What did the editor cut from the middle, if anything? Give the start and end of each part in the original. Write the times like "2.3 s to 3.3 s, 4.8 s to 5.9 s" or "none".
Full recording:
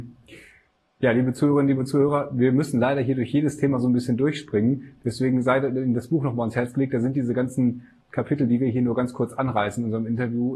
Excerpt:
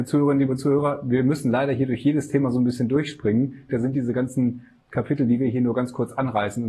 5.0 s to 6.9 s